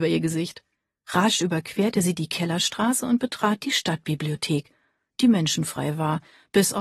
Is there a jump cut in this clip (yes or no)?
no